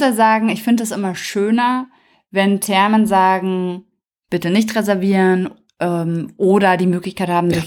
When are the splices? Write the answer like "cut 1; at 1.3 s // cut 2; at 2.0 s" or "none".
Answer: none